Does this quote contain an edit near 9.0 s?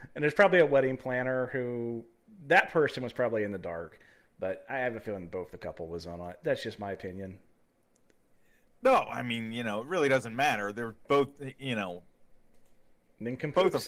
no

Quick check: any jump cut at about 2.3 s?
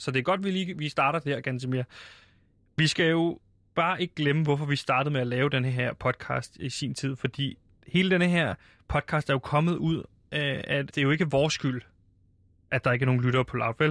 no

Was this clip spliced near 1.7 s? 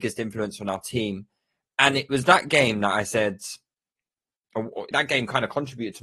no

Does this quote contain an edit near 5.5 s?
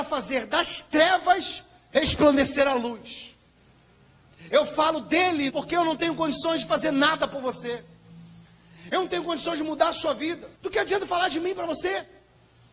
yes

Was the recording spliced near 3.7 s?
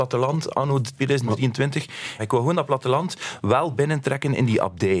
no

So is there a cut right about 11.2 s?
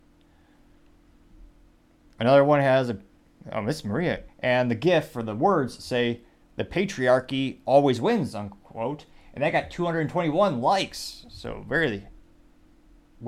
no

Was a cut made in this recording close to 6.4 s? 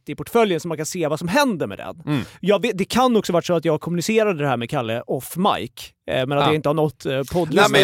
no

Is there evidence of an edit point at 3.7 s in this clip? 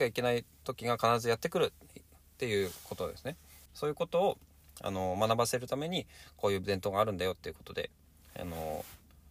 yes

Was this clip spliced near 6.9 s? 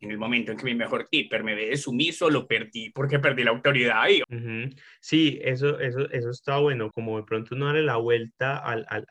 yes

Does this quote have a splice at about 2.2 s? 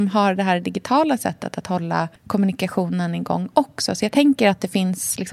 yes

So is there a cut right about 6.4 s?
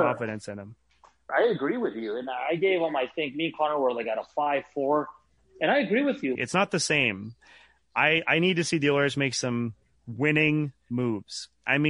yes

